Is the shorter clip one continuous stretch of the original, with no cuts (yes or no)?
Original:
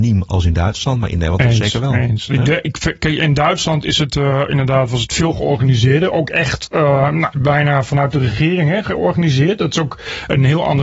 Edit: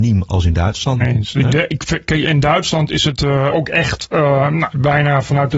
no